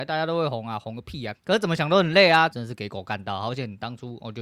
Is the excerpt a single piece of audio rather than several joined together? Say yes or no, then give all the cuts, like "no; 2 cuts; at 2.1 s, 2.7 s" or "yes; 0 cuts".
no; 2 cuts; at 1.3 s, 2.5 s